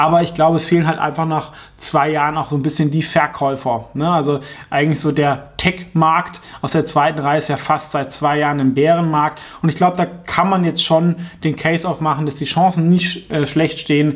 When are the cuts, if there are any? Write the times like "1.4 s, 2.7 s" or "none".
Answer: none